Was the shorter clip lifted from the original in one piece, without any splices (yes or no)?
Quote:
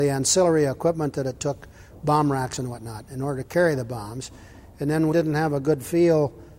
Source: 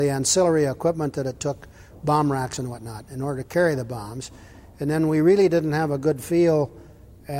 no